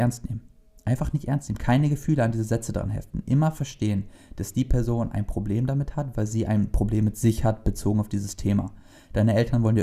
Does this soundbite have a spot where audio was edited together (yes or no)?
no